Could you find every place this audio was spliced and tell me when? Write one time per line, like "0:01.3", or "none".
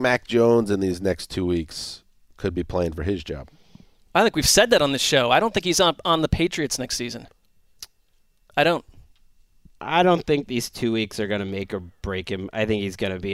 none